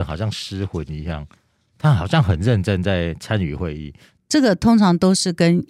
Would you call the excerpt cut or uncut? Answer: cut